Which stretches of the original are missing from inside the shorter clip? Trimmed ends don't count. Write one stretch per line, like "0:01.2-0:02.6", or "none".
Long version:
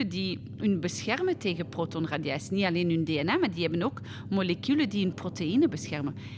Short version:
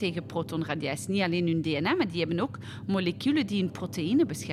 none